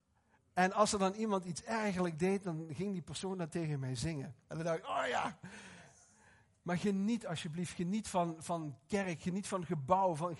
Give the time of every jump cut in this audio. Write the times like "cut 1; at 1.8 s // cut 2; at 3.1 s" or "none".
cut 1; at 4.4 s